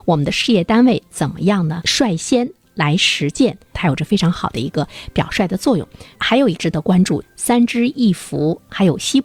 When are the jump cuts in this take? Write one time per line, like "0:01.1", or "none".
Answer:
0:03.7
0:07.2